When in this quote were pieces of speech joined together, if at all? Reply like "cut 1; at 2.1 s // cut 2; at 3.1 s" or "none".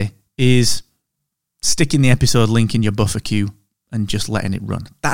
none